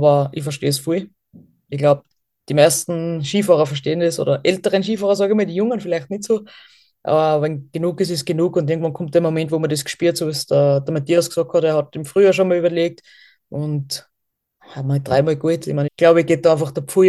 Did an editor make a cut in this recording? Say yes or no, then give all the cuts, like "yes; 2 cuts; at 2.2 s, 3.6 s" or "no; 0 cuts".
yes; 1 cut; at 15.9 s